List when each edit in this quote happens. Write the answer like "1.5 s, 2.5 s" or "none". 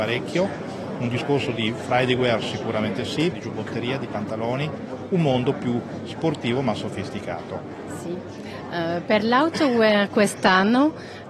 3.3 s